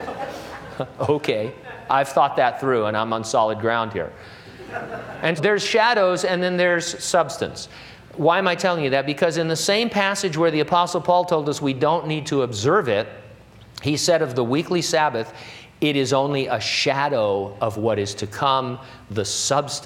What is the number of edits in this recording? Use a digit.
1